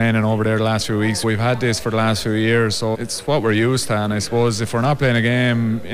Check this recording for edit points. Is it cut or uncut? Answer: cut